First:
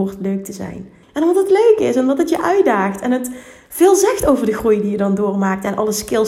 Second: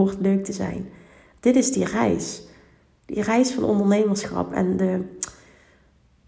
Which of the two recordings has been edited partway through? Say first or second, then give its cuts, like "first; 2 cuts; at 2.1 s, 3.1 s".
first; 1 cut; at 1.0 s